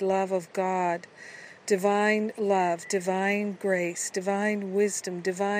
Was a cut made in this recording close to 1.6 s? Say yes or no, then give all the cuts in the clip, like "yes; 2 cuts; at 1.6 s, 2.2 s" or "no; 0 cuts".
no; 0 cuts